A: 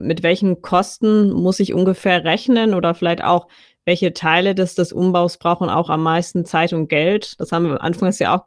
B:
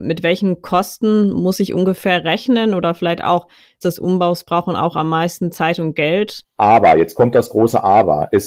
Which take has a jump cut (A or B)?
B